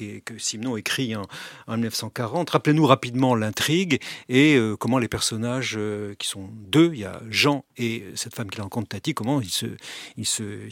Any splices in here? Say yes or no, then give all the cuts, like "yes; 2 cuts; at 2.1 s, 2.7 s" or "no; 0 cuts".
no; 0 cuts